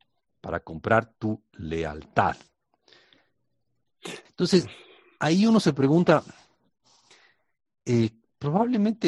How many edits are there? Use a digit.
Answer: 1